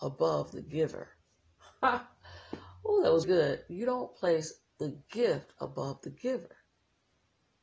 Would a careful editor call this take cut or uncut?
cut